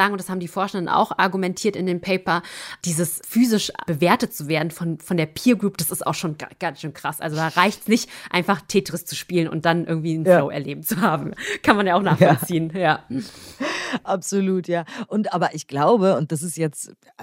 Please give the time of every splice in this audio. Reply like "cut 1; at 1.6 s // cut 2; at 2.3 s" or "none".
none